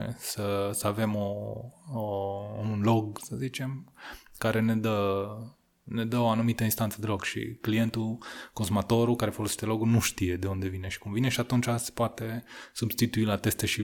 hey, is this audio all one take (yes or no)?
no